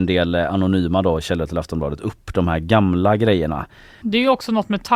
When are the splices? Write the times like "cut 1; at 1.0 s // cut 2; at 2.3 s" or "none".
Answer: cut 1; at 4.0 s